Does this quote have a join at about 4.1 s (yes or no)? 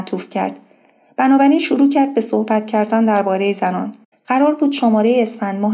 yes